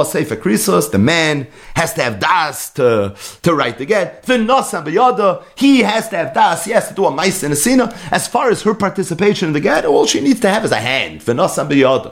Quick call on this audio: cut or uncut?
uncut